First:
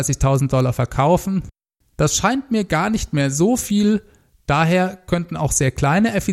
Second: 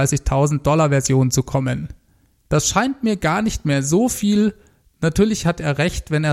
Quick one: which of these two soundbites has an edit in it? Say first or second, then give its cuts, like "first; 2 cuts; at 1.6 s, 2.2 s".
first; 2 cuts; at 1.8 s, 4.4 s